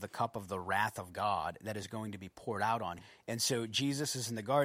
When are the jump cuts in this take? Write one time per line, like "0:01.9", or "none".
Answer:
0:03.0